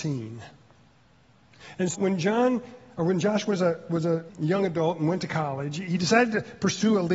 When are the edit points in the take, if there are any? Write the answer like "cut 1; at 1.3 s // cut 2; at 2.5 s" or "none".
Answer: cut 1; at 1.9 s // cut 2; at 4.3 s